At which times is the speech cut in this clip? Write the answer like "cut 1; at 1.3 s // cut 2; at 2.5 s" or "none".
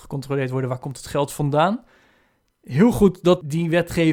none